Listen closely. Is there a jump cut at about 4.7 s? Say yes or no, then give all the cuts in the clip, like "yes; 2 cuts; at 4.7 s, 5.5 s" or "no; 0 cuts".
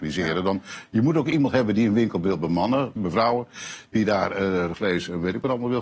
yes; 2 cuts; at 3.0 s, 4.7 s